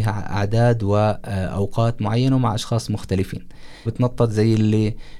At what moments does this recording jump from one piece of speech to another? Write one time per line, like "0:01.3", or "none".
0:03.9